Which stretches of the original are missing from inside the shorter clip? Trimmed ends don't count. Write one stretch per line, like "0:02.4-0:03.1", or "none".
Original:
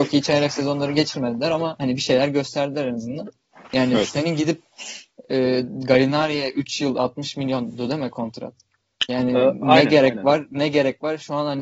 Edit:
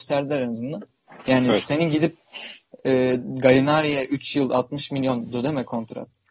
none